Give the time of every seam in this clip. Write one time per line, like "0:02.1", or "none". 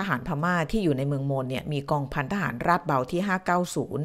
none

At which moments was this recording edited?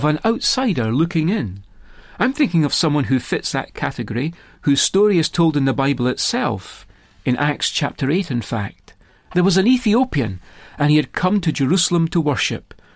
none

